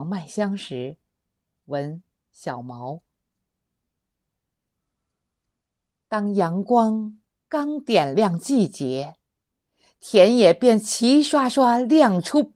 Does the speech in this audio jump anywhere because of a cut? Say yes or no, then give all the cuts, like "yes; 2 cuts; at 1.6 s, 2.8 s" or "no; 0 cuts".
no; 0 cuts